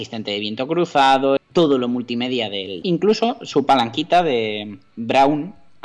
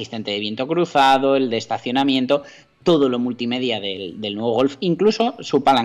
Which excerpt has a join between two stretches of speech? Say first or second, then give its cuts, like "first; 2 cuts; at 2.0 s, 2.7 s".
first; 2 cuts; at 1.4 s, 2.8 s